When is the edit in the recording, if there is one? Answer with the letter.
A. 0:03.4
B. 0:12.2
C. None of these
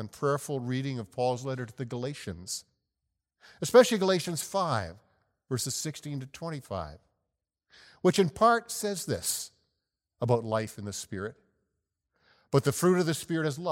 C